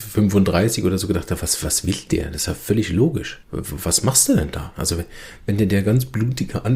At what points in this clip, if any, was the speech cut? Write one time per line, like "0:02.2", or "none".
0:03.4
0:04.7

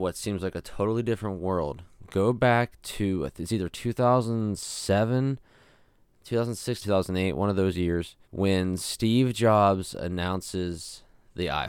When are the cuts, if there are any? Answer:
0:06.8
0:08.2

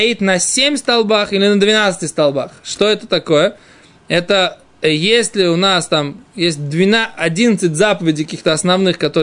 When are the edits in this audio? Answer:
none

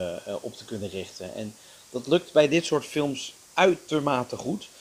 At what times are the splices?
none

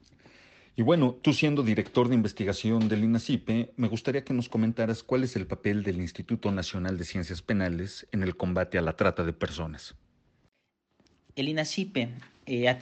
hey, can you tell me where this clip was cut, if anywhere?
none

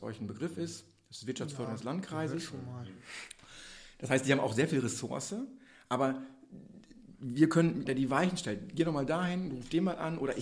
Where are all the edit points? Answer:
0:07.9
0:09.5

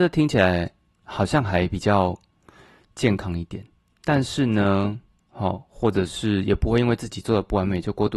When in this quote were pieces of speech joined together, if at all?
0:03.9
0:05.2

